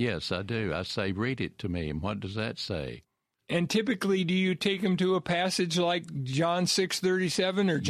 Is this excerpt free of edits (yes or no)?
yes